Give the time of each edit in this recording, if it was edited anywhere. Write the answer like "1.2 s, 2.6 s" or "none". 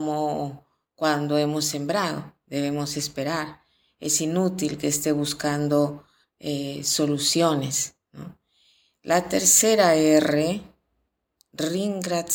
none